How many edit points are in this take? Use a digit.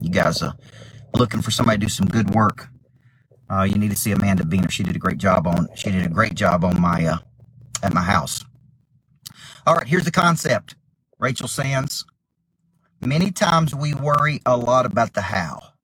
0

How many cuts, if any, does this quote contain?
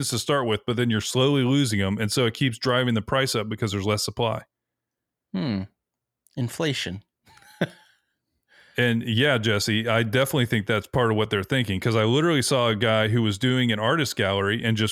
0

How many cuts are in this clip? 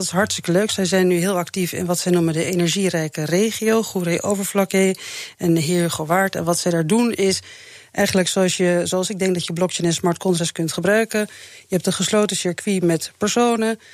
0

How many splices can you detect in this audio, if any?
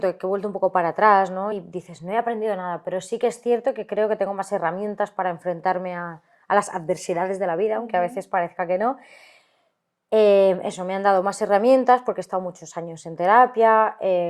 0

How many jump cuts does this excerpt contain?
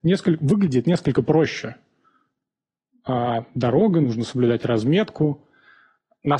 0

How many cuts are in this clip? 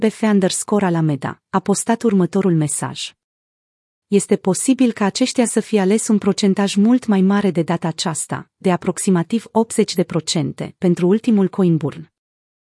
1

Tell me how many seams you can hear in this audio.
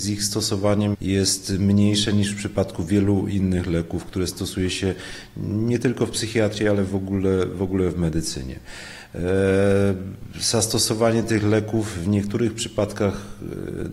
1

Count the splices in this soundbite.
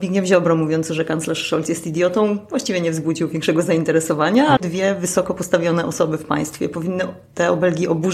1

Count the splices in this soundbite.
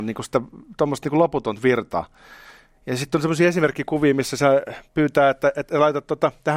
0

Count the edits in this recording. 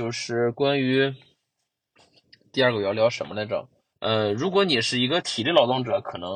1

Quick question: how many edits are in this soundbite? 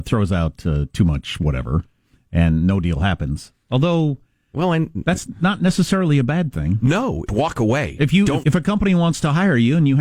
2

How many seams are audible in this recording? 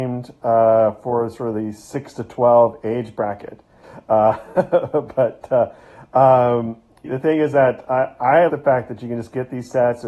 3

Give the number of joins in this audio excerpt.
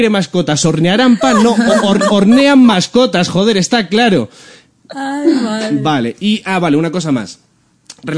1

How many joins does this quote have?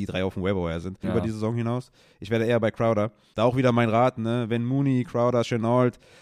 2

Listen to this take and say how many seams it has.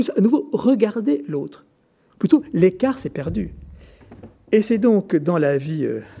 1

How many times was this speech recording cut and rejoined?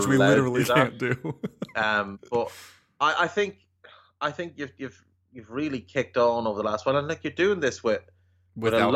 0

